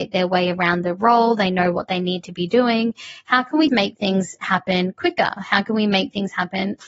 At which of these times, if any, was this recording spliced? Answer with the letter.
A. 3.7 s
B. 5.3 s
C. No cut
A